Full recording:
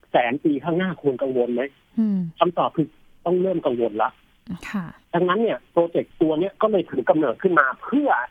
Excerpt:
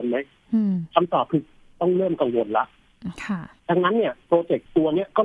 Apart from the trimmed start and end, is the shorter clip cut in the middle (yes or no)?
no